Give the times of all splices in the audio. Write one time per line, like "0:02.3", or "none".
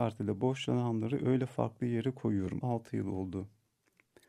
0:02.6